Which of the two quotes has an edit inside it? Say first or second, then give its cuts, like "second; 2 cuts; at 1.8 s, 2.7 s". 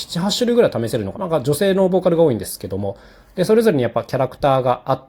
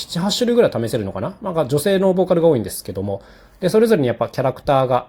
first; 1 cut; at 1.1 s